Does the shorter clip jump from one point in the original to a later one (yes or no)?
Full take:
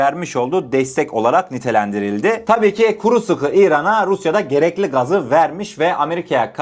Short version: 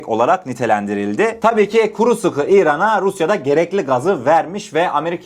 no